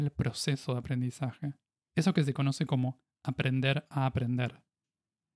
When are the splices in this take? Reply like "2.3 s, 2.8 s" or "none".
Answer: 1.8 s

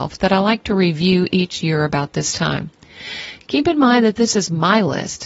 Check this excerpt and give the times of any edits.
none

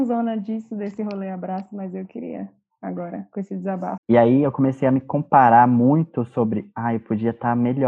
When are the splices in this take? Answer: 4.0 s

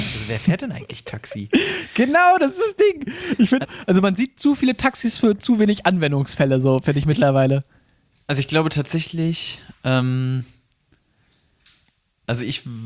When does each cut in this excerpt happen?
3.6 s

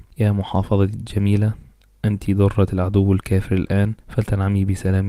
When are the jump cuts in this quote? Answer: 4.0 s

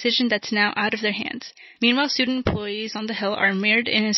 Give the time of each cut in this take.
none

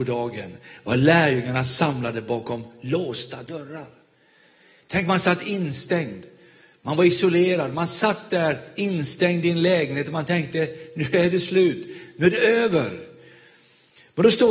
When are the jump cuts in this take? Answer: none

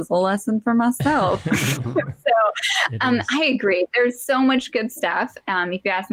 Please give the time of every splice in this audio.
none

